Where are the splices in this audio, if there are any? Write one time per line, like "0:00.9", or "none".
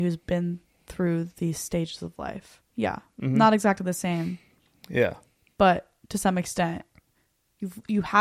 0:02.7